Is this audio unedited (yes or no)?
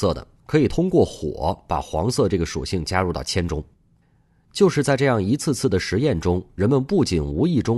yes